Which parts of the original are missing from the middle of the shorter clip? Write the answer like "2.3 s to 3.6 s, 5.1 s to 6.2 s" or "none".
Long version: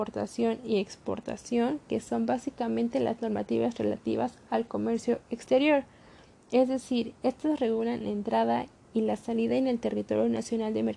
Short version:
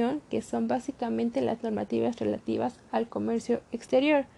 none